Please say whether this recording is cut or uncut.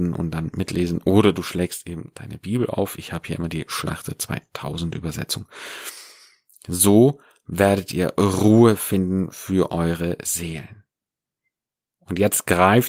uncut